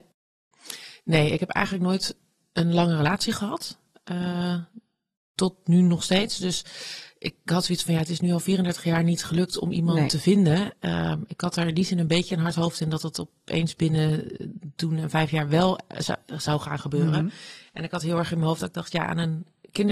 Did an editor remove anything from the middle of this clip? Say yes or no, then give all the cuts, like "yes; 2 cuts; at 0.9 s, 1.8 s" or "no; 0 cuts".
no; 0 cuts